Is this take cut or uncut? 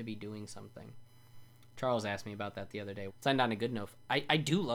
cut